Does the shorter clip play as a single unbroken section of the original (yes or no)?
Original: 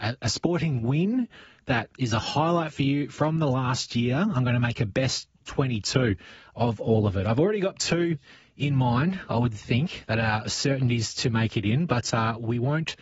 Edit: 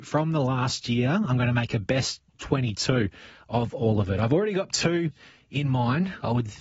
yes